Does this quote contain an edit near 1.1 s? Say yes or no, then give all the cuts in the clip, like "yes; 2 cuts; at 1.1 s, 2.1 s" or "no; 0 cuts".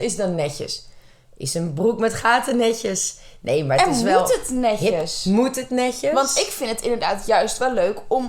no; 0 cuts